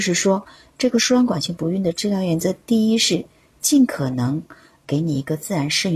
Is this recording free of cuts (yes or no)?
yes